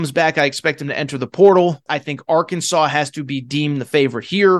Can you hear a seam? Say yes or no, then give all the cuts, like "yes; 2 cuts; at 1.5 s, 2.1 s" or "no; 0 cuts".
yes; 1 cut; at 1.9 s